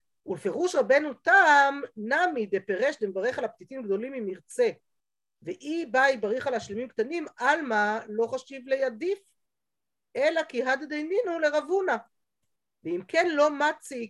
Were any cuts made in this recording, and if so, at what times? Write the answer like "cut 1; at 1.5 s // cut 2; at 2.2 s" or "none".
none